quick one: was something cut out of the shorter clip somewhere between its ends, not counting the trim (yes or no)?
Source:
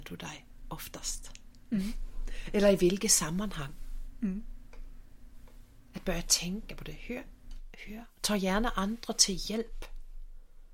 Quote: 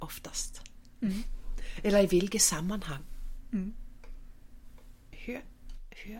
yes